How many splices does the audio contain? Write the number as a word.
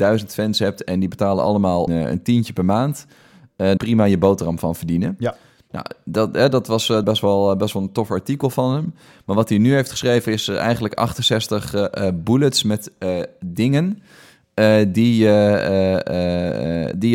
three